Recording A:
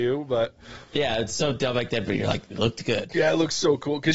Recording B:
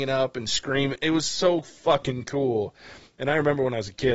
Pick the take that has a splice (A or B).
A